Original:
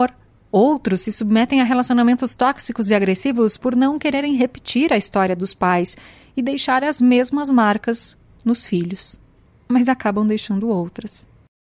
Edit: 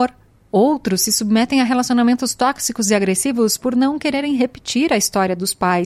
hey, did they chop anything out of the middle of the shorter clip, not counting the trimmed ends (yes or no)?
no